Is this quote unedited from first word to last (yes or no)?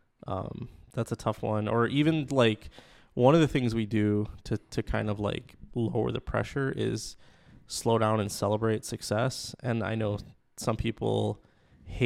yes